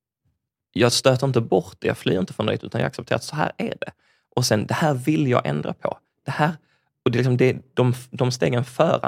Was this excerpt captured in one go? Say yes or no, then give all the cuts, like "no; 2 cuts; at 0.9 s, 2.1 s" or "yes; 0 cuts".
yes; 0 cuts